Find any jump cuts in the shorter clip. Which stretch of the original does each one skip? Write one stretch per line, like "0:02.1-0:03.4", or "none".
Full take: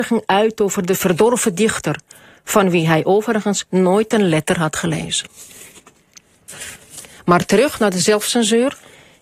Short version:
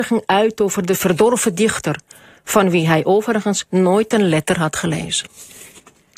none